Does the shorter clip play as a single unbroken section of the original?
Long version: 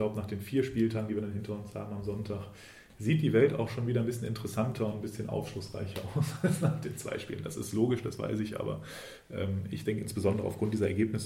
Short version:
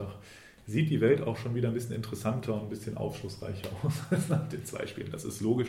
yes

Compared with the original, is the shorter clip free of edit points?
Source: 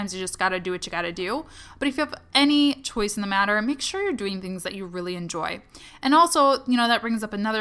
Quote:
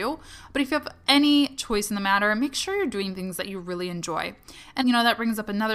no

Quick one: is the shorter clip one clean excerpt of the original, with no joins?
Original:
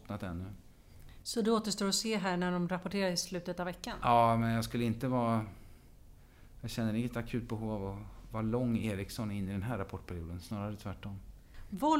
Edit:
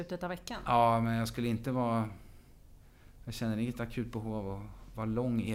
yes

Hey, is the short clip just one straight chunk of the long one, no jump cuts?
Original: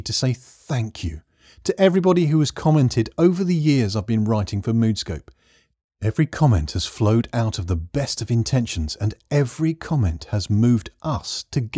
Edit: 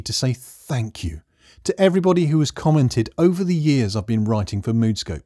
yes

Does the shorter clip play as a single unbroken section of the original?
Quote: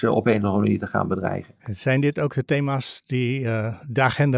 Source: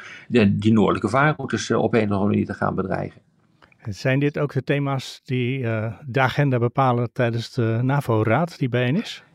no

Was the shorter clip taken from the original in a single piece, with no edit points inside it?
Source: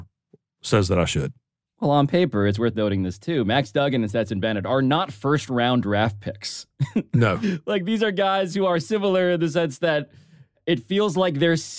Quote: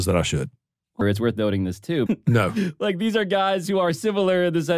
no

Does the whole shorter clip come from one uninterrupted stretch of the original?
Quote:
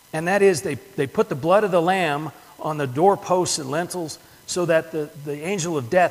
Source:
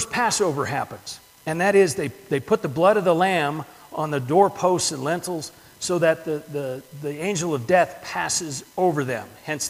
no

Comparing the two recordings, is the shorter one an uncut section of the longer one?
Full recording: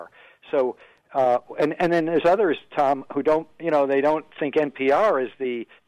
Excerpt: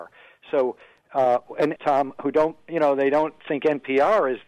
no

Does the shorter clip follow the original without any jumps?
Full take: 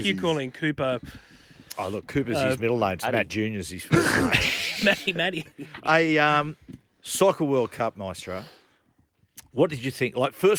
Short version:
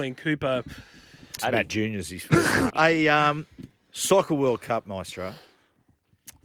no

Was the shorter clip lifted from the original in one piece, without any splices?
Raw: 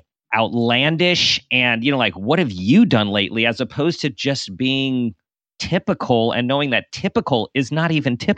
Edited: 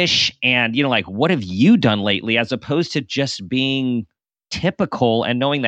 yes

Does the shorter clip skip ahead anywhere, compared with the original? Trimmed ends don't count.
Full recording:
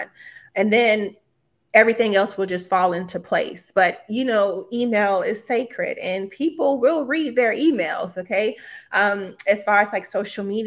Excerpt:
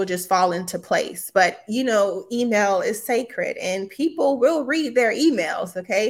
no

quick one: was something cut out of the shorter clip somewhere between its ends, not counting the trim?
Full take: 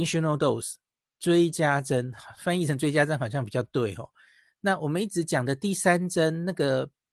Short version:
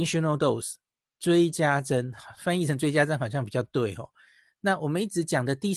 no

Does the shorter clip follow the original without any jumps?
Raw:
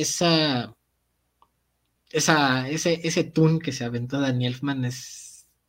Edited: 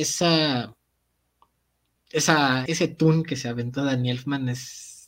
no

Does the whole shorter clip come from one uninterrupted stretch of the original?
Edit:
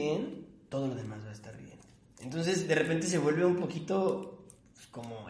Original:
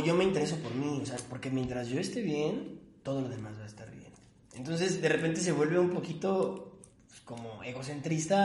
yes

